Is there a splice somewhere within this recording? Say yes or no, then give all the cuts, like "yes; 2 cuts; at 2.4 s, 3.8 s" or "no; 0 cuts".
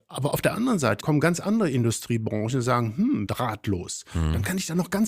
yes; 2 cuts; at 1.0 s, 3.3 s